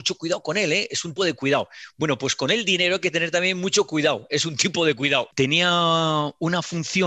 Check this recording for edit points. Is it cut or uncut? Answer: cut